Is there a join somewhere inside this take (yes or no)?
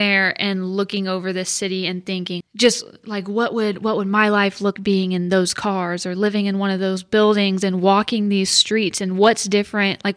yes